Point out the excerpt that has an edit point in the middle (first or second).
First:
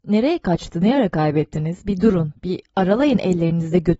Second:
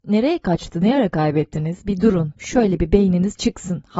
second